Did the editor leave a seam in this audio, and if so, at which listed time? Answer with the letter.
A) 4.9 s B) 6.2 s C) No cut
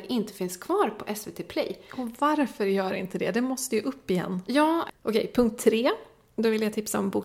A